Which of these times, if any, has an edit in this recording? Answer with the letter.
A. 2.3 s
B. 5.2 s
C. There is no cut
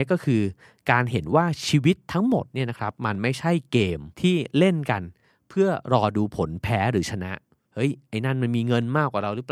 C